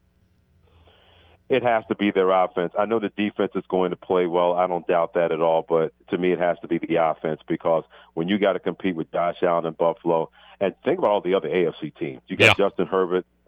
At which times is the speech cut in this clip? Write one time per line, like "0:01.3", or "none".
none